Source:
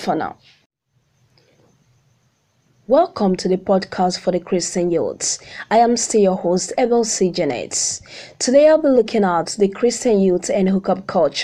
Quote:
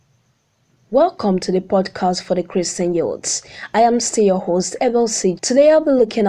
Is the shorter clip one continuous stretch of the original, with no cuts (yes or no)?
no